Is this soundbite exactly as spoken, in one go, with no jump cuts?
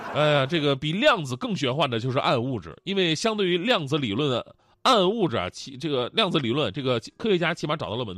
yes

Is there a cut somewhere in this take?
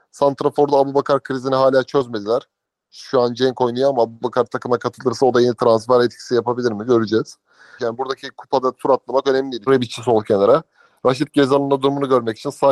yes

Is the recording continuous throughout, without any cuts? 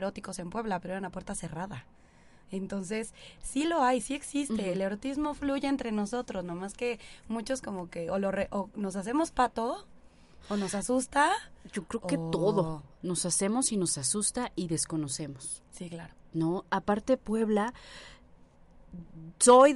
yes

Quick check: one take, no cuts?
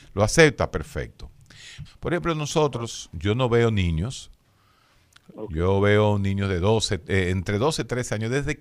no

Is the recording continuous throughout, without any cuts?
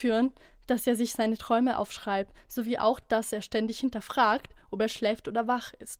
yes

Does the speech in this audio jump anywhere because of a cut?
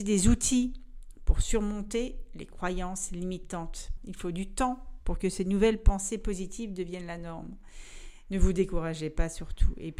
yes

